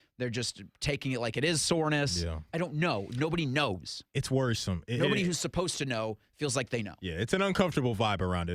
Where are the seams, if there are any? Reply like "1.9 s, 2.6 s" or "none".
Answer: none